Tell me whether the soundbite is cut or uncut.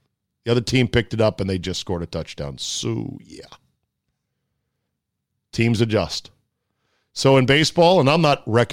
uncut